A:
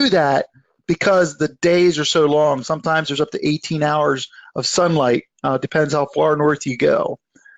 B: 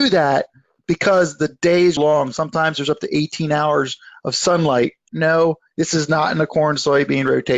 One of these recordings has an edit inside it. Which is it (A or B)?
B